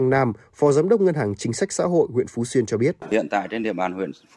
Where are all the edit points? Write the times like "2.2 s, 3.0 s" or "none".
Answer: none